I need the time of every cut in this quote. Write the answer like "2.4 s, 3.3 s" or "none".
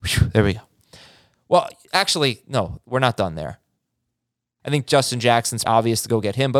4.6 s, 5.6 s